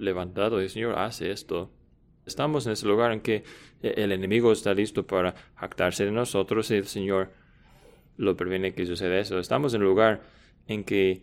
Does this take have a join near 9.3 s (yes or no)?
no